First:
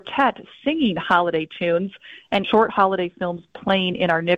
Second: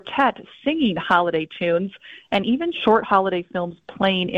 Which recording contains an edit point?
first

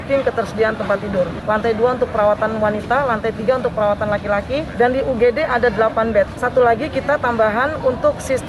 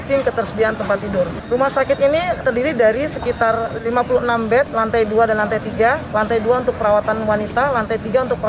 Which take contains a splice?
first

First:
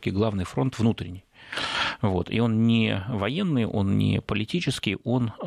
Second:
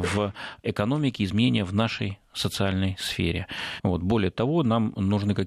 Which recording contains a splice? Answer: second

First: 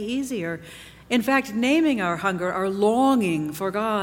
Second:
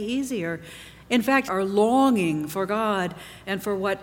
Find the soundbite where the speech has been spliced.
second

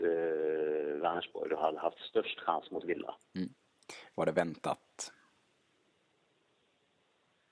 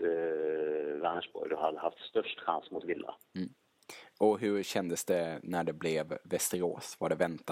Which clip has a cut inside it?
first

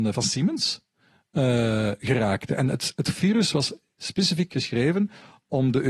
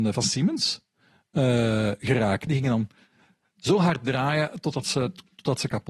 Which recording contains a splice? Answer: second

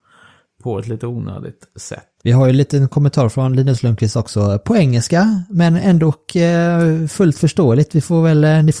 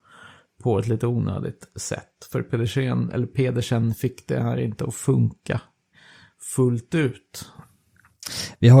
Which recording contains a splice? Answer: first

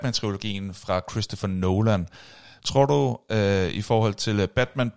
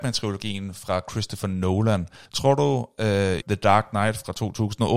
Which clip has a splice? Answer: second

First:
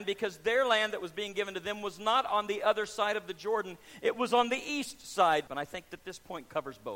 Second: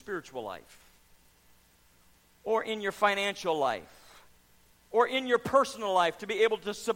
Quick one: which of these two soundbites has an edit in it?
first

